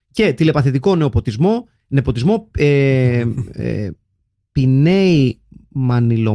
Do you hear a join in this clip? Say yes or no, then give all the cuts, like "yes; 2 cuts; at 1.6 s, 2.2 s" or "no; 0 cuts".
no; 0 cuts